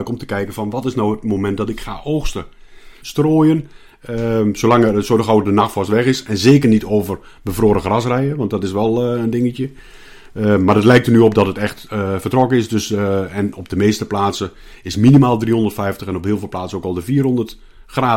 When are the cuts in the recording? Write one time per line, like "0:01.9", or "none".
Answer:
0:03.0